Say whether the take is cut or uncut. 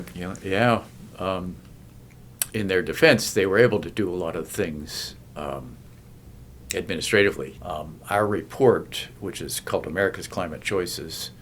cut